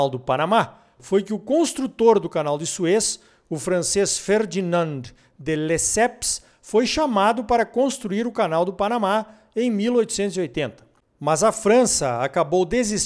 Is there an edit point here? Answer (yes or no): no